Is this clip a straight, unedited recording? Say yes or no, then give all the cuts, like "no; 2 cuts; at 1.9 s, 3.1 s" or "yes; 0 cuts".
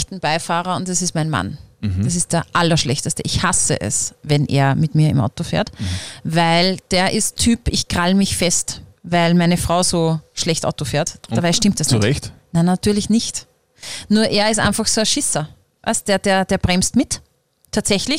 yes; 0 cuts